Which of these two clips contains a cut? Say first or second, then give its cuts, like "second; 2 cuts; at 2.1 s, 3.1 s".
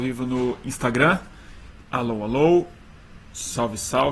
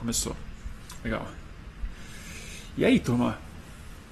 first; 1 cut; at 1.8 s